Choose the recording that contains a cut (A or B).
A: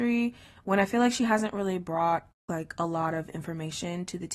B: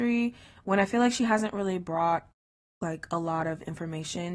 A